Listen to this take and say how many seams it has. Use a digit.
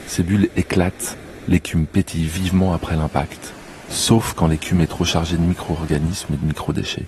1